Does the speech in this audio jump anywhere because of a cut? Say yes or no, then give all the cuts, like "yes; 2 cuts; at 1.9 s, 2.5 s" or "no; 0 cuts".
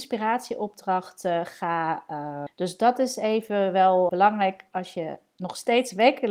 yes; 2 cuts; at 2.5 s, 4.1 s